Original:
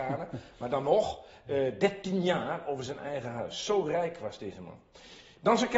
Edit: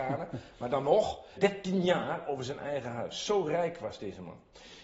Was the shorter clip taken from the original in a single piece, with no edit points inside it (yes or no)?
no